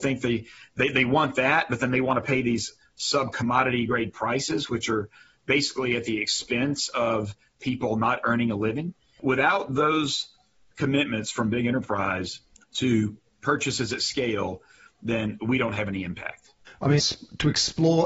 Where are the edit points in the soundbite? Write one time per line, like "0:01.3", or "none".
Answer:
0:17.0